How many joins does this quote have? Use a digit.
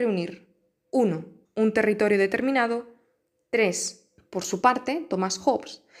2